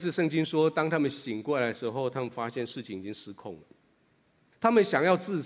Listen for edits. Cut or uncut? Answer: cut